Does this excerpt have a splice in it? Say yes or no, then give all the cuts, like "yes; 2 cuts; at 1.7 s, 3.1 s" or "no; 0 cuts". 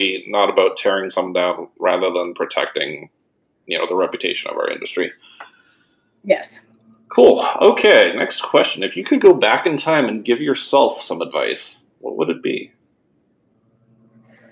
no; 0 cuts